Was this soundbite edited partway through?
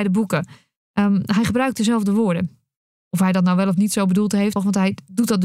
yes; 1 cut; at 4.6 s

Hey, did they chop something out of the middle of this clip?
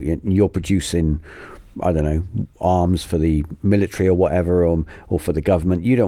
no; 0 cuts

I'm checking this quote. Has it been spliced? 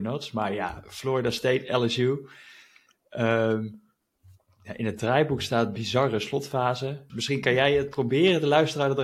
yes; 1 cut; at 7.1 s

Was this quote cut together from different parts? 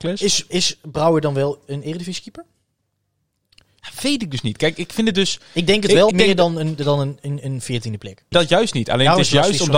yes; 2 cuts; at 6.1 s, 8.3 s

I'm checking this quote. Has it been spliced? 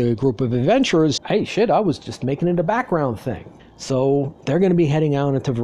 yes; 2 cuts; at 1.2 s, 3.6 s

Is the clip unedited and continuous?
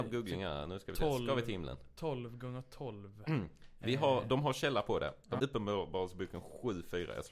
no; 2 cuts; at 3.3 s, 5.4 s

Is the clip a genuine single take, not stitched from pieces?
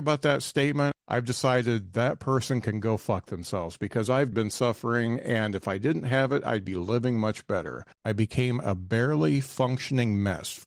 no; 2 cuts; at 4.3 s, 7.9 s

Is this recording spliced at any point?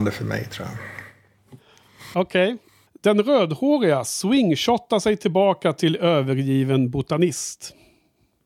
yes; 1 cut; at 2.9 s

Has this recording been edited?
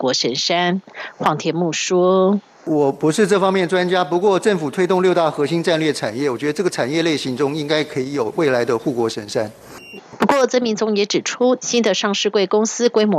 yes; 2 cuts; at 10.0 s, 11.6 s

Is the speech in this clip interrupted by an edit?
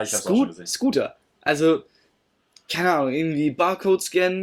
no; 0 cuts

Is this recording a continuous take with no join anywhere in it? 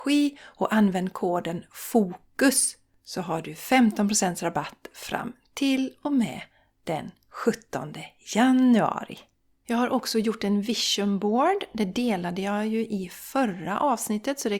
yes; 0 cuts

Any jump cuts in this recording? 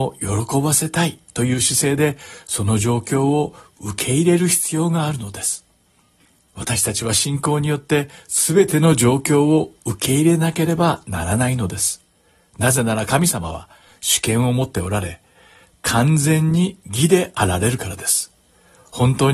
no; 0 cuts

